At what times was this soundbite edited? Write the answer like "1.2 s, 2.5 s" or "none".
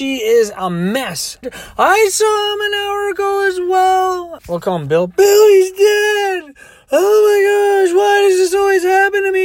1.4 s, 4.4 s